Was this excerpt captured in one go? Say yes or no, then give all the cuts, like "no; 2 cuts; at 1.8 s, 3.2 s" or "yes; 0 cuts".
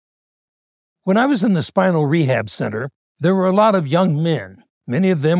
yes; 0 cuts